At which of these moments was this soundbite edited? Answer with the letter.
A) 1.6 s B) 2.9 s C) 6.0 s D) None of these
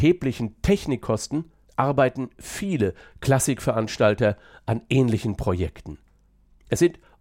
A